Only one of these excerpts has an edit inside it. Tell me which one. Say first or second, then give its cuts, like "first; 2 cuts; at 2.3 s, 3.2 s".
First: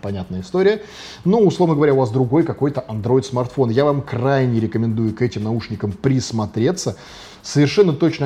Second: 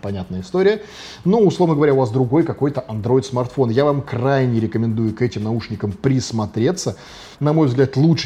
second; 1 cut; at 7.3 s